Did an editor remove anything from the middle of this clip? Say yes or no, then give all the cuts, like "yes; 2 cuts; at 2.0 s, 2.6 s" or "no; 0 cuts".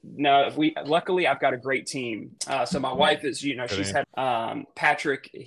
yes; 2 cuts; at 2.4 s, 4.0 s